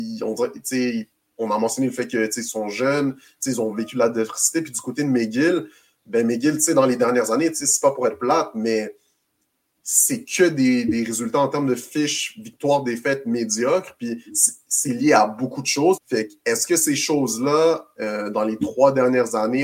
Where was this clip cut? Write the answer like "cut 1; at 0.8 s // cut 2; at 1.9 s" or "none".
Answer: cut 1; at 16.0 s